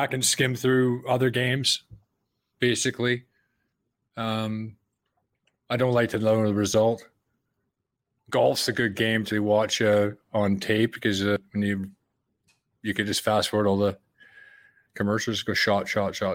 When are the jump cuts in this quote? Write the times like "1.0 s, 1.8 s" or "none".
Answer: 9.3 s